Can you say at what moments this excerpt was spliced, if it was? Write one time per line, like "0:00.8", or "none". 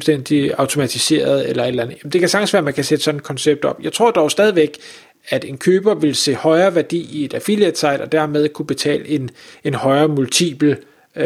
none